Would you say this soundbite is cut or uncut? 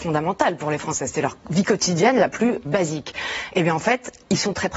cut